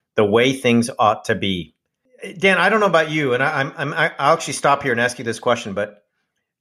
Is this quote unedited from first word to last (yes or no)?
yes